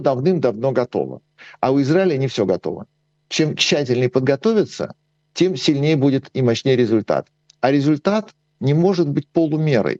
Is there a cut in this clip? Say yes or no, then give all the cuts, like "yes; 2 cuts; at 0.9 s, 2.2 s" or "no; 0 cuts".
no; 0 cuts